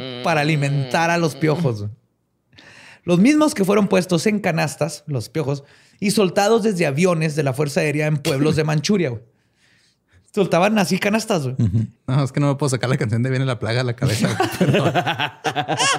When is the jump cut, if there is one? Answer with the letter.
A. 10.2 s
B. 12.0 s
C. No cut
B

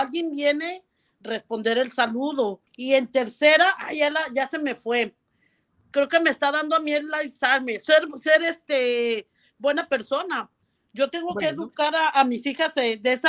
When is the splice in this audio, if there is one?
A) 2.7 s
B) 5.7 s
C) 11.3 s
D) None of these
A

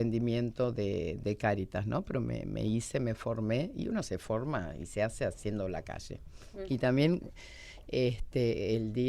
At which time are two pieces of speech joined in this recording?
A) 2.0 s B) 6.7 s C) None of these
B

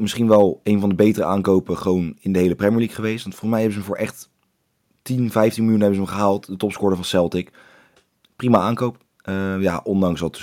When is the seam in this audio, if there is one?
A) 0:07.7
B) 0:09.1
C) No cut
C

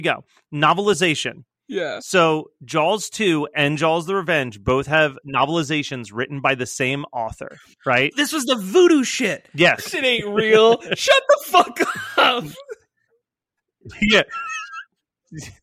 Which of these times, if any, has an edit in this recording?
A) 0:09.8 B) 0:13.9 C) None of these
A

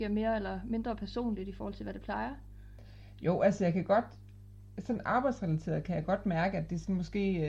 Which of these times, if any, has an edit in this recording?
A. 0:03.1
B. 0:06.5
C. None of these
C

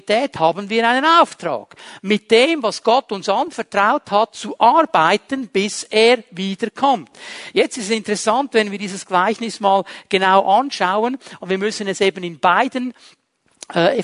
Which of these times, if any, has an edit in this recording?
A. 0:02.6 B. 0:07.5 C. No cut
C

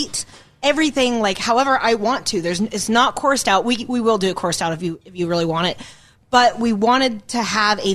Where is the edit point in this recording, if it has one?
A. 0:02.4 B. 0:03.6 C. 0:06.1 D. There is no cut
D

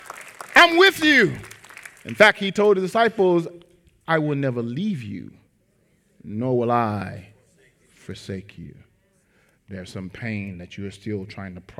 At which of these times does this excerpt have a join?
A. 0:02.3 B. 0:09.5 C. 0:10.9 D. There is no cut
B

